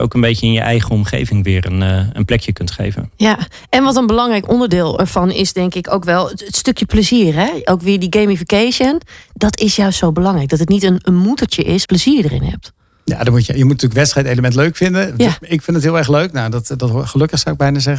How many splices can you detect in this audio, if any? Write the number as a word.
one